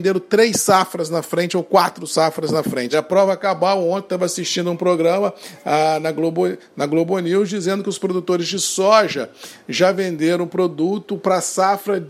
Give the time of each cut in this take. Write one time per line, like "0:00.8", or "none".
0:02.9